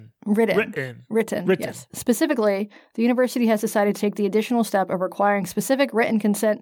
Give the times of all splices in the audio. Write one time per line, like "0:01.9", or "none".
0:01.9

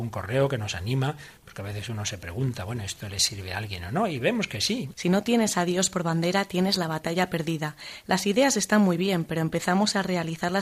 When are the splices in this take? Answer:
0:04.9

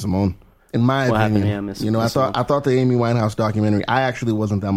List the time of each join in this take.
none

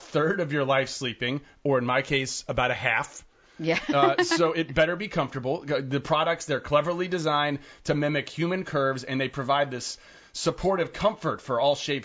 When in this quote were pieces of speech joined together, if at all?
none

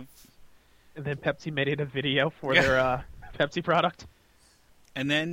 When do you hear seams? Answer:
none

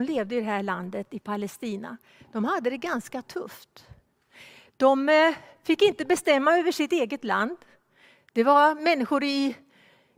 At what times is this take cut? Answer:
none

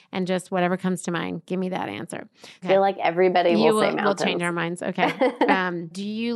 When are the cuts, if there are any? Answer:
0:02.6

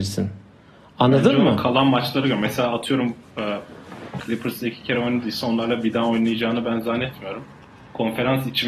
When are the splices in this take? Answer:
0:04.2

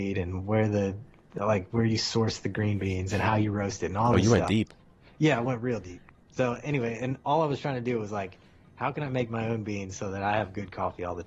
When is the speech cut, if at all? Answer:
none

